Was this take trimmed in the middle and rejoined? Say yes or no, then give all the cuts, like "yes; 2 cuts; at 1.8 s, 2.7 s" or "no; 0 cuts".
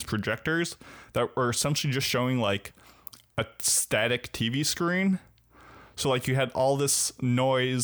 no; 0 cuts